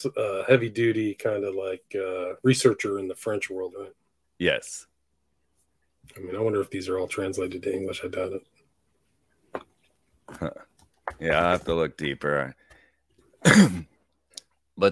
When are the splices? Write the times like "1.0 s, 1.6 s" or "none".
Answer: none